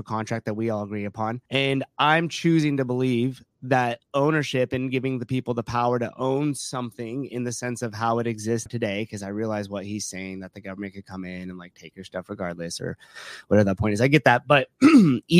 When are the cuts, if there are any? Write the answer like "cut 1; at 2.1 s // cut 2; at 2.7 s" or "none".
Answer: cut 1; at 1.5 s // cut 2; at 8.7 s